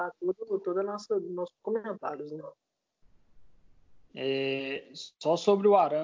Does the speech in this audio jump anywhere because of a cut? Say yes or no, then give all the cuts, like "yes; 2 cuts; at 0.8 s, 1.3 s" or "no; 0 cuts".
yes; 1 cut; at 4.1 s